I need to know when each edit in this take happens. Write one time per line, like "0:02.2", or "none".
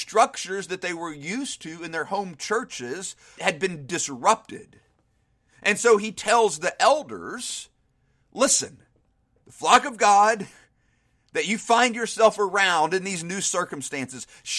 0:03.4